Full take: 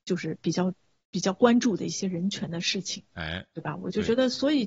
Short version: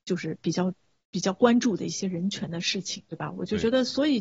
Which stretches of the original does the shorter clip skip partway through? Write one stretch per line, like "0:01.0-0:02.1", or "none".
0:03.1-0:03.5